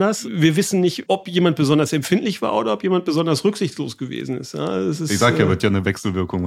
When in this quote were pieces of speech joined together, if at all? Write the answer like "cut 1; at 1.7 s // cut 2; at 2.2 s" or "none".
cut 1; at 1.1 s